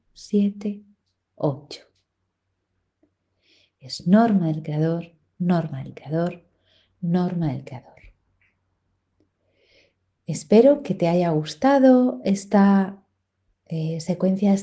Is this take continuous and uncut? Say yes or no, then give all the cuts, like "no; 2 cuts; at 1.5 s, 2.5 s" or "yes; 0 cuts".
yes; 0 cuts